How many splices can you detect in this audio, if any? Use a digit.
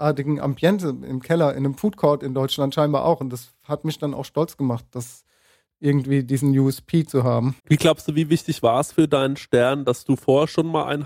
1